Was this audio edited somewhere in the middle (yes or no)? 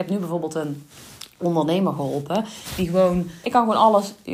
yes